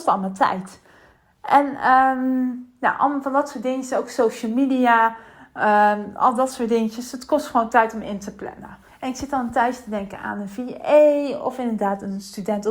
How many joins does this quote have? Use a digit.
1